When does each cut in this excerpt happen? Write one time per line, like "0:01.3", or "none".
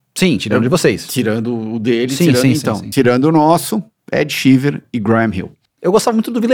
none